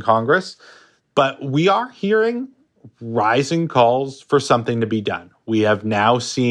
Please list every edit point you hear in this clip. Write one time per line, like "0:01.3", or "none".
0:01.0